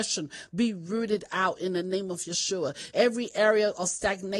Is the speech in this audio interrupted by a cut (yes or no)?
yes